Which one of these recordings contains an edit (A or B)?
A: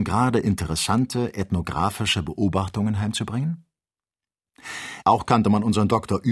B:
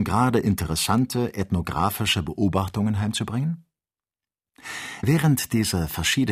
A